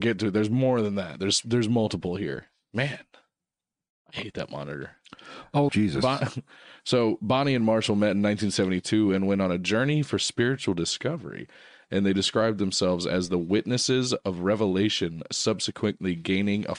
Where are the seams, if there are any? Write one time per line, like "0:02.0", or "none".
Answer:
0:05.7